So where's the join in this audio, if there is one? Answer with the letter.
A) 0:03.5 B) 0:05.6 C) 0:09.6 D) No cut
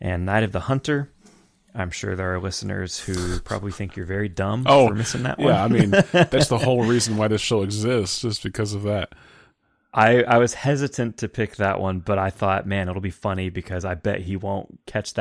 D